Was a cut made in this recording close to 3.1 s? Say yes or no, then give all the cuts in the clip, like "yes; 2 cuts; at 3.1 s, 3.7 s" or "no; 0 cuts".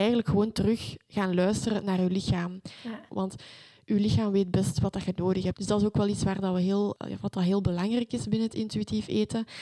yes; 2 cuts; at 3.1 s, 5.5 s